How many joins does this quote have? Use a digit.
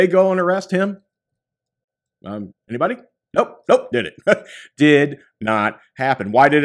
2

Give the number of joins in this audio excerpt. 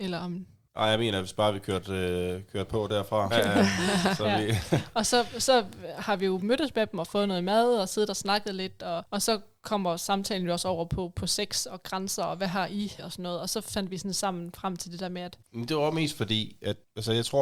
3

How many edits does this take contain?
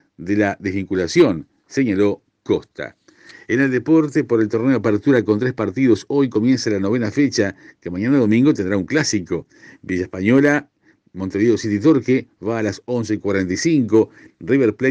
0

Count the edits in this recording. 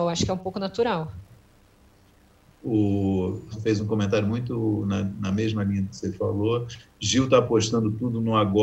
1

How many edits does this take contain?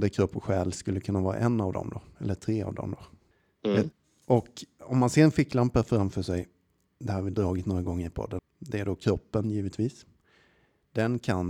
1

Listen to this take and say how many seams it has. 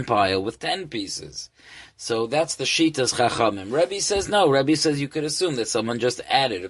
0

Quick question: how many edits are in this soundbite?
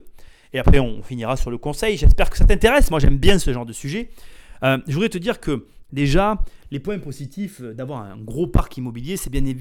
0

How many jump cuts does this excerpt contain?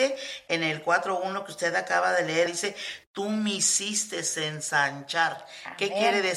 1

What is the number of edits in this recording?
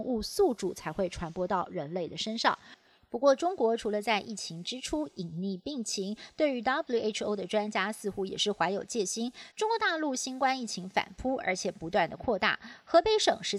1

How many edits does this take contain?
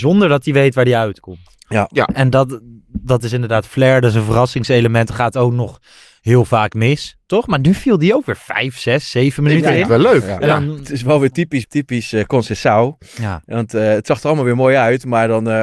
1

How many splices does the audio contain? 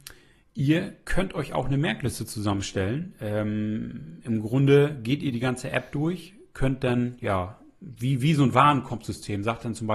0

